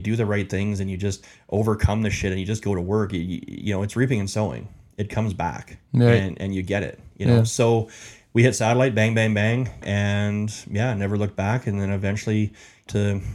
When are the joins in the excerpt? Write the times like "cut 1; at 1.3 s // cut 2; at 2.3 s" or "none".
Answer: none